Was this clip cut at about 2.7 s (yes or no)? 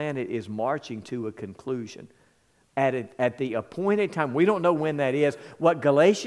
yes